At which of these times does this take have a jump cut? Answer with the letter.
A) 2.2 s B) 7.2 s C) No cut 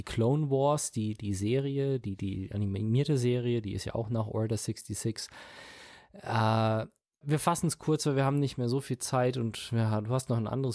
B